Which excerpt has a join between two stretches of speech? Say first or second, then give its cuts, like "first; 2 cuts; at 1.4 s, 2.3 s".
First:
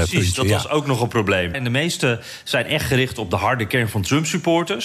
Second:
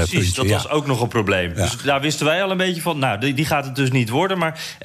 first; 1 cut; at 1.5 s